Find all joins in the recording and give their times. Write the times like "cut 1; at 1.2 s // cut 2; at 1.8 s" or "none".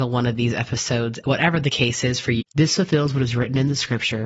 cut 1; at 1.2 s // cut 2; at 2.4 s